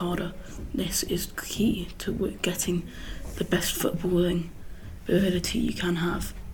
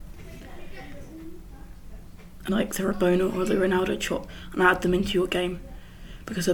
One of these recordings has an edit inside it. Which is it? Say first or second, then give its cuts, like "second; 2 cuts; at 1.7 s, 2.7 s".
second; 1 cut; at 2.5 s